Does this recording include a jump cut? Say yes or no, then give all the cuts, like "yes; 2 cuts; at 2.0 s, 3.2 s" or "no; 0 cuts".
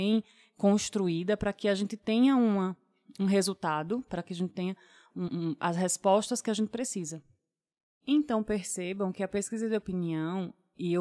no; 0 cuts